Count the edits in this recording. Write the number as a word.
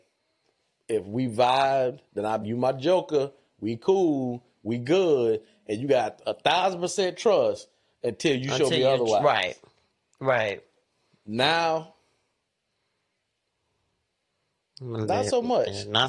one